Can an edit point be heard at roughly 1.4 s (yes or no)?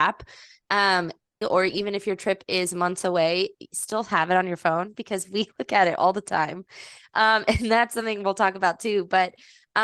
yes